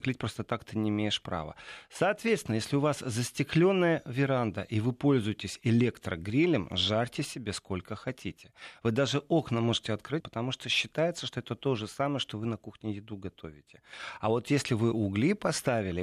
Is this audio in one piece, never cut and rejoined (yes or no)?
no